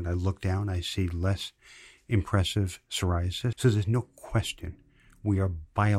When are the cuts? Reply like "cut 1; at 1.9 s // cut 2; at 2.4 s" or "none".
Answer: cut 1; at 3.5 s